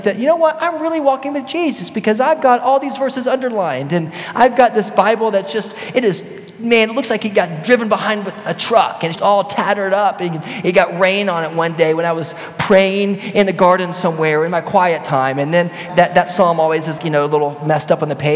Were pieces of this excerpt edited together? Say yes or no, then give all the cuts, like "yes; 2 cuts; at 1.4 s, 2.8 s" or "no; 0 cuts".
yes; 3 cuts; at 9.2 s, 15.9 s, 17.0 s